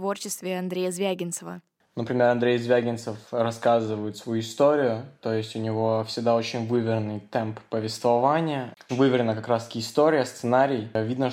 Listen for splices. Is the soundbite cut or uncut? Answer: cut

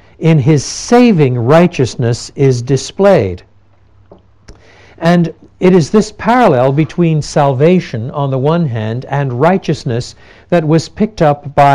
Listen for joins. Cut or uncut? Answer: uncut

